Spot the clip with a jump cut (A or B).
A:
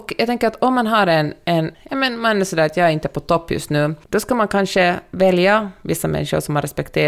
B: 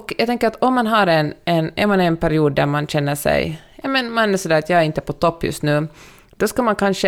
A